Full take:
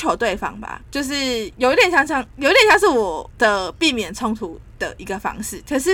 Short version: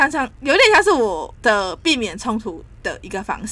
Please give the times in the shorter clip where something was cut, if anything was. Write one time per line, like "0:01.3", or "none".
none